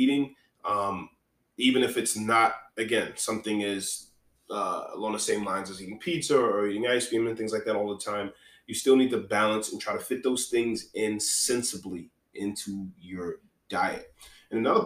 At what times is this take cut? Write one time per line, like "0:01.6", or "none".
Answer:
none